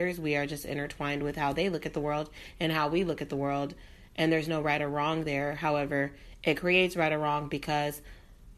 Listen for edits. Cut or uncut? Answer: uncut